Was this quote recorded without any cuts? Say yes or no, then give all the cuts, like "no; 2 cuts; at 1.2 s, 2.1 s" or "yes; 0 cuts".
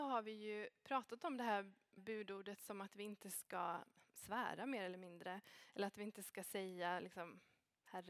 no; 1 cut; at 2.0 s